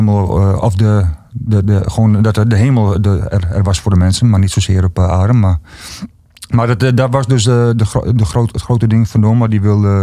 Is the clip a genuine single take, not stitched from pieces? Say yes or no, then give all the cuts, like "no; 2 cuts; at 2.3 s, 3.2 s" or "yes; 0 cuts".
yes; 0 cuts